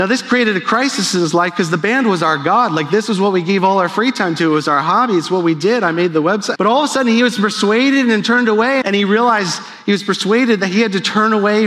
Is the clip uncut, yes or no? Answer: no